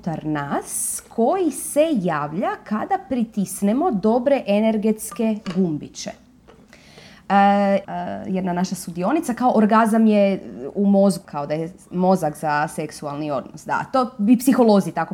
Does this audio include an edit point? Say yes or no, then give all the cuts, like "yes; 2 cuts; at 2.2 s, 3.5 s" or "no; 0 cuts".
yes; 2 cuts; at 7.8 s, 11.2 s